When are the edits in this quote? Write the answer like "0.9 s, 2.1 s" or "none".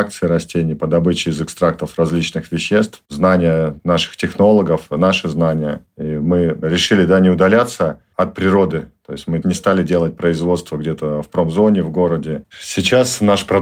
12.5 s